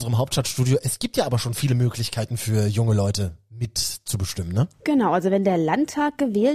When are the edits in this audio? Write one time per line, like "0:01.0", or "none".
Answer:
none